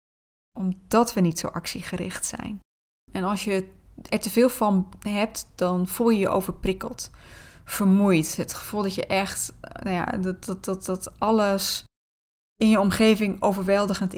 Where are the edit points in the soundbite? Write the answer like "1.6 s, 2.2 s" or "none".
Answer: 3.1 s